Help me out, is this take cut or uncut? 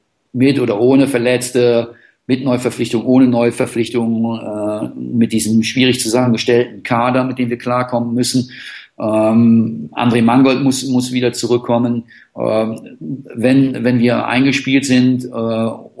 uncut